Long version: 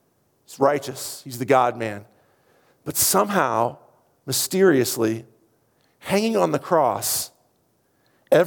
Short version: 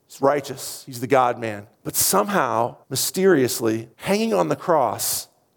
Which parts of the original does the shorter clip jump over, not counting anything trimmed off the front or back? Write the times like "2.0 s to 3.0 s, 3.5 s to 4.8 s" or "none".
2.1 s to 2.7 s, 3.8 s to 4.2 s, 5.3 s to 6.0 s